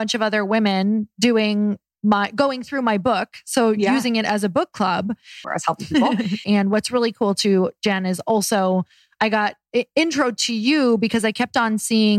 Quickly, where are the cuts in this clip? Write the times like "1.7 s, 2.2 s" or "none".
5.4 s, 6.4 s